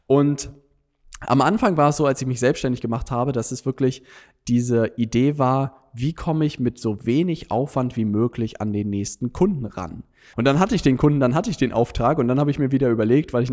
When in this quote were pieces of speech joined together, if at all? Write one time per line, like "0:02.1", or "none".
0:10.3